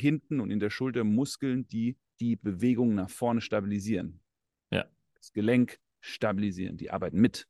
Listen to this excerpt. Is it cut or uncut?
uncut